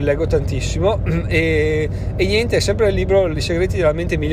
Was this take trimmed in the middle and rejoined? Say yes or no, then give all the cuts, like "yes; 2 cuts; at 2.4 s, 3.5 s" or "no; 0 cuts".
no; 0 cuts